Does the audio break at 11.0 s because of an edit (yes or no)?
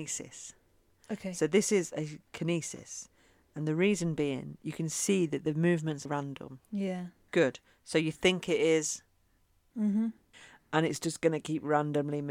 no